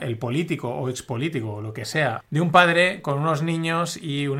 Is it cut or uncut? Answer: cut